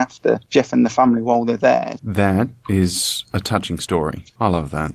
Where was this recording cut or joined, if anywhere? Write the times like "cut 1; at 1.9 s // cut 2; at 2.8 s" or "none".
cut 1; at 2.0 s